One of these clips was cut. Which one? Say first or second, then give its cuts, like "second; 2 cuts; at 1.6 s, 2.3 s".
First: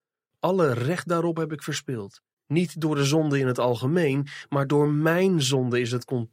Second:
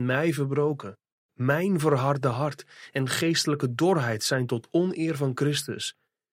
first; 1 cut; at 2.3 s